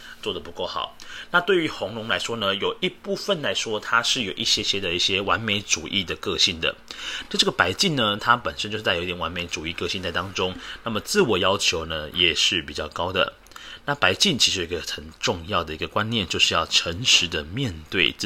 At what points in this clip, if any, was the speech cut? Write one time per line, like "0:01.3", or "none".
none

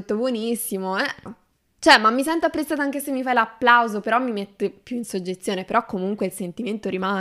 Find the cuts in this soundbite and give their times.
0:01.3

